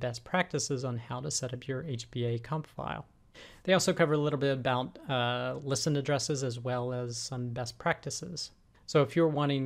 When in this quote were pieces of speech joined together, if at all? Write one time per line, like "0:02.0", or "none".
none